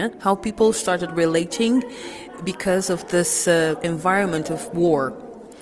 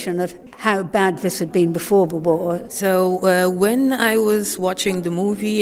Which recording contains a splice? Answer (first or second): second